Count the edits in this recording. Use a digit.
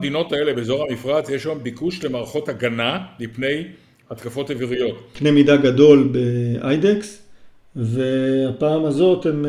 1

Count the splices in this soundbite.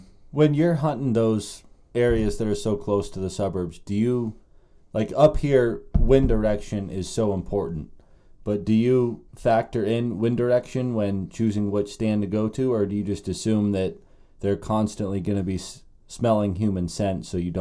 1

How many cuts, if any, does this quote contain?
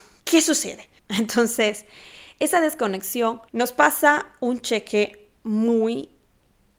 2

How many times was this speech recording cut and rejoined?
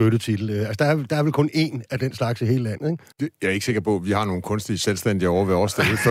1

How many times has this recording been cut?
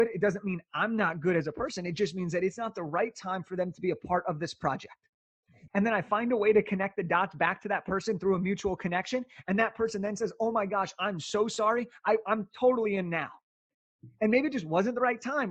1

